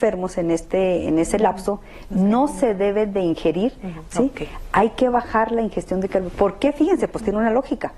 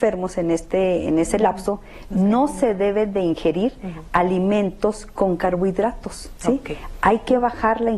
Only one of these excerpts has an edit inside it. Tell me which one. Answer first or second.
first